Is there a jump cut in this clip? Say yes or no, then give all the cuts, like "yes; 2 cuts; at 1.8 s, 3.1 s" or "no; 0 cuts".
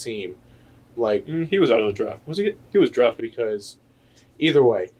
yes; 1 cut; at 3.2 s